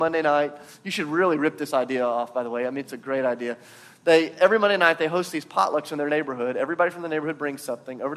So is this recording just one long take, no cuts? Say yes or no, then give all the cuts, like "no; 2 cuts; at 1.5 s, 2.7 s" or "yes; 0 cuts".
yes; 0 cuts